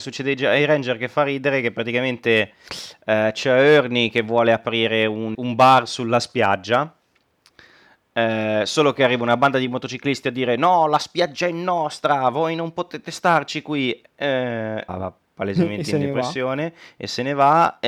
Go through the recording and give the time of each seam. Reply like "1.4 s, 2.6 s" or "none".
5.3 s, 14.9 s